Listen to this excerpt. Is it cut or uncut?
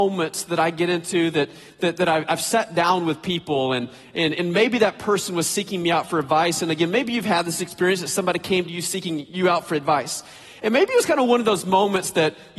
uncut